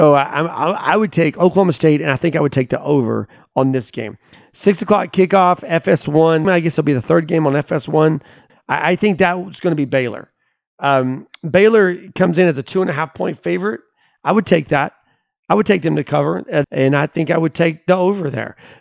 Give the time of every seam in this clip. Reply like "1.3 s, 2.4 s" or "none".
6.4 s, 8.5 s, 16.6 s